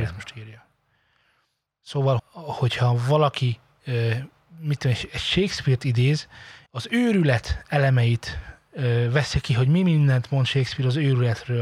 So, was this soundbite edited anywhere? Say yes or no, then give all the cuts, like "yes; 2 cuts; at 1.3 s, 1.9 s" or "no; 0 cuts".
yes; 2 cuts; at 2.2 s, 6.7 s